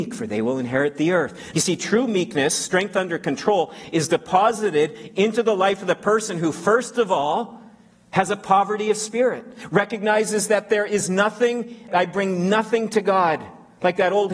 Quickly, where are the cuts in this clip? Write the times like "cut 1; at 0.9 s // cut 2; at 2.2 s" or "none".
cut 1; at 1.5 s // cut 2; at 11.9 s